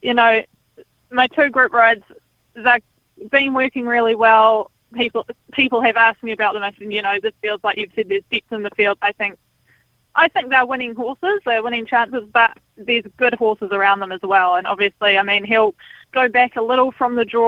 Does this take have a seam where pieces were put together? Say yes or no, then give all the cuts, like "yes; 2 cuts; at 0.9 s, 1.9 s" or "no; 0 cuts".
yes; 2 cuts; at 9.0 s, 16.0 s